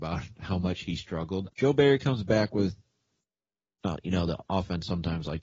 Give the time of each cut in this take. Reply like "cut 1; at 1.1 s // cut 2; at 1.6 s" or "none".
cut 1; at 1.5 s